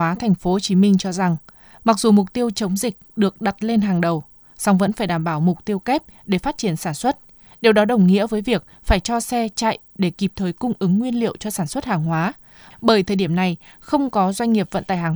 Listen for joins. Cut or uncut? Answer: uncut